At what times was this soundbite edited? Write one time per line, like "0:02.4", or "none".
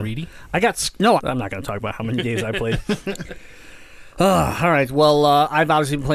0:01.2